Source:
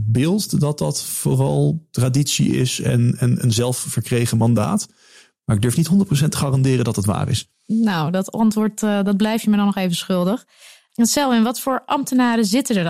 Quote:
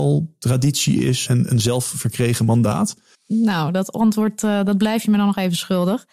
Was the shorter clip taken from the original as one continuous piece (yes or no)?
no